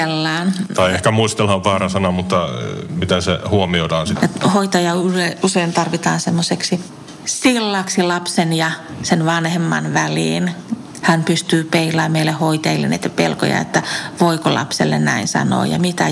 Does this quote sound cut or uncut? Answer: cut